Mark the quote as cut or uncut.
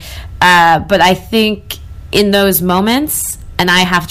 uncut